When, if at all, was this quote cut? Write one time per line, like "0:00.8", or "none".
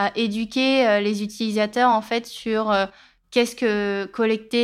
none

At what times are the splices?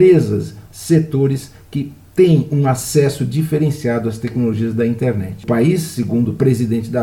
none

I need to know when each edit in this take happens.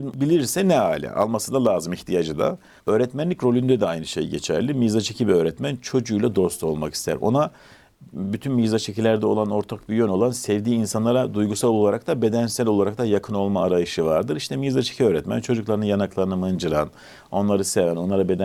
0:02.8

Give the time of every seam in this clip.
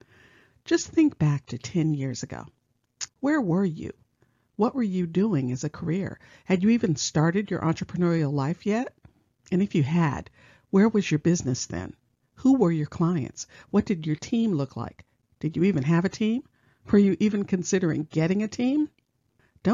0:03.1

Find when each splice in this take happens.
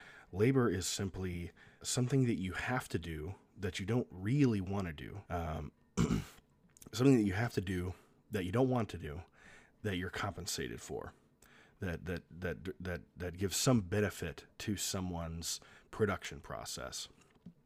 0:01.8
0:05.2

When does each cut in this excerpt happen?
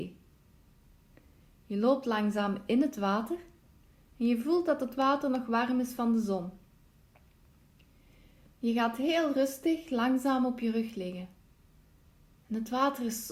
none

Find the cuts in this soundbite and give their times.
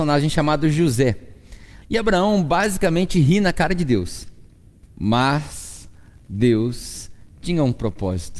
0:01.8
0:04.8

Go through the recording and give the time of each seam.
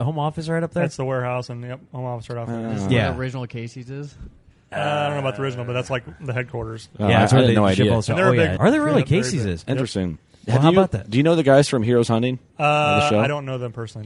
0:08.6
0:12.5

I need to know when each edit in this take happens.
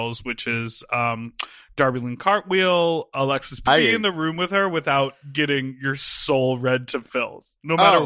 0:03.7

